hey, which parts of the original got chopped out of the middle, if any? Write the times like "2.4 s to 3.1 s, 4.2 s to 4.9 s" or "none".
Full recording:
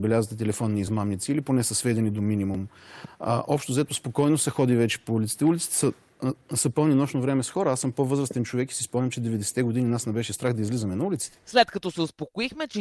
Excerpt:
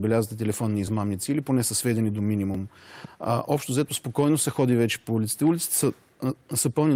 none